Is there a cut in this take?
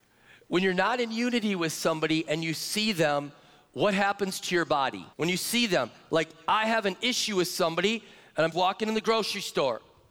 yes; 2 cuts; at 5.1 s, 8.5 s

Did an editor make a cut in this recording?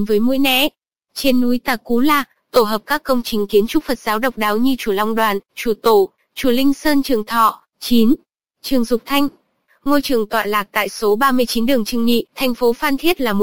yes; 2 cuts; at 7.7 s, 12.3 s

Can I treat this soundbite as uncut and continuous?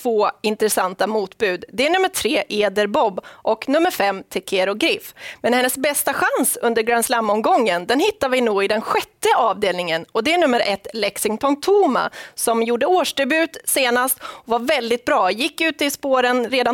yes; 0 cuts

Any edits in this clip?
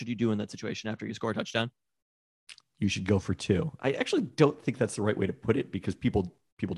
yes; 1 cut; at 3.8 s

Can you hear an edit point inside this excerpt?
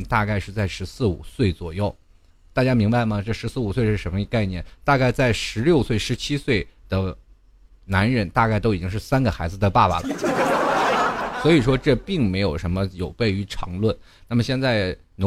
no; 0 cuts

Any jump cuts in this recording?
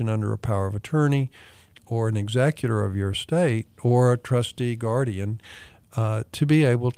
no; 0 cuts

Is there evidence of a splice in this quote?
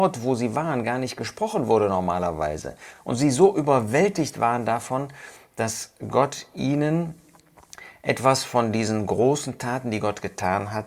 no; 0 cuts

